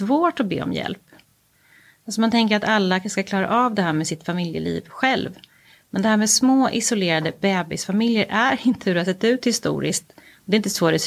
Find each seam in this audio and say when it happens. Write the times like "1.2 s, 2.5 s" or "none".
none